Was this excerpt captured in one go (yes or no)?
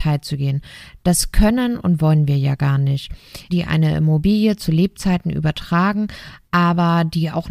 no